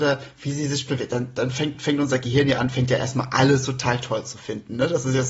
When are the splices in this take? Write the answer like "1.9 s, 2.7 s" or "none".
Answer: none